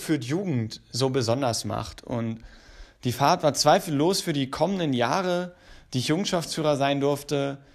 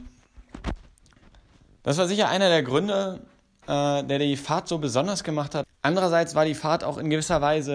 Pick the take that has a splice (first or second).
second